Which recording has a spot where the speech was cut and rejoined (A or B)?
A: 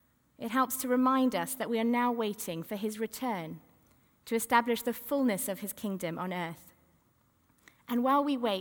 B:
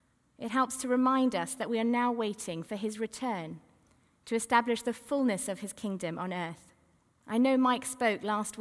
B